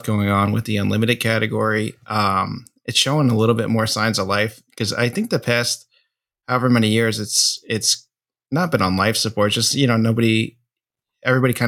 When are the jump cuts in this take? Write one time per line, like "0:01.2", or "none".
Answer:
none